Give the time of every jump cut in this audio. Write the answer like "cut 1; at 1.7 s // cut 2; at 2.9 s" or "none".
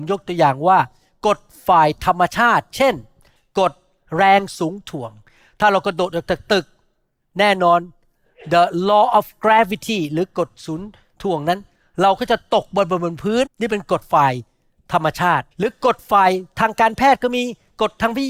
cut 1; at 13.5 s // cut 2; at 15.5 s